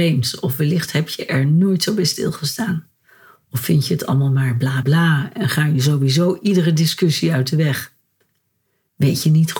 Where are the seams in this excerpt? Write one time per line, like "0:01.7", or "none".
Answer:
0:04.8